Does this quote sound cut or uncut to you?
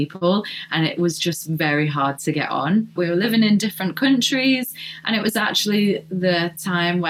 cut